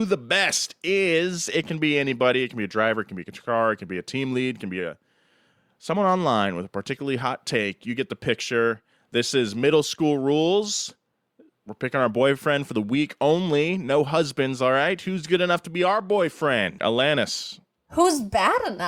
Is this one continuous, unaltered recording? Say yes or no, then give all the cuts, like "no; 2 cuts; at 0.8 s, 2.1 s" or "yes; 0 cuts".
yes; 0 cuts